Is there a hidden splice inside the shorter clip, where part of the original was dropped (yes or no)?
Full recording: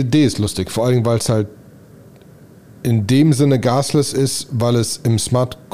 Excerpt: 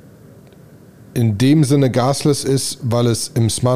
no